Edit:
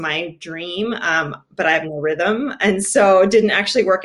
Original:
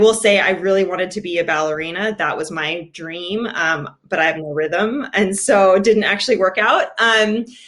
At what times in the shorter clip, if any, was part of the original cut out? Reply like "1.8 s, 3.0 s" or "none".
none